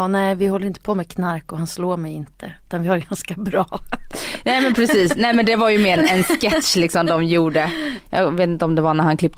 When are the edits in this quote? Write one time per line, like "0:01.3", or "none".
0:06.0